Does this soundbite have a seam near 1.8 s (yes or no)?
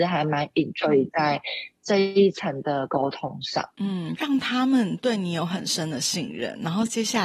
no